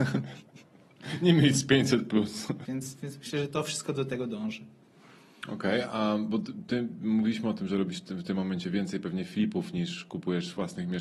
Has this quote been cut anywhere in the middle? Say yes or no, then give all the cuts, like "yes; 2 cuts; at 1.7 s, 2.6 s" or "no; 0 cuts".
yes; 1 cut; at 2.7 s